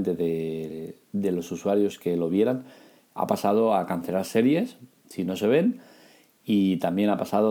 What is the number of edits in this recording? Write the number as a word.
zero